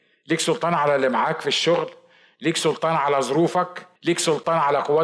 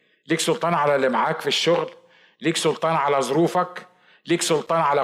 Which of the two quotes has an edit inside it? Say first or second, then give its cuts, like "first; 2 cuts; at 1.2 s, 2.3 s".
first; 1 cut; at 4.0 s